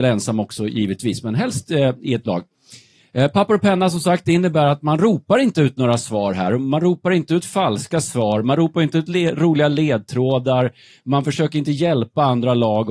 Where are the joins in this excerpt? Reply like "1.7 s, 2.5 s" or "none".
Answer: none